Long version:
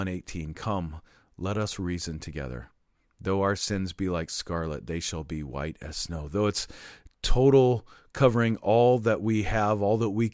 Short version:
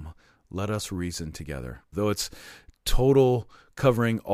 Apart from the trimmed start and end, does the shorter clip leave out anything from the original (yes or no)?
yes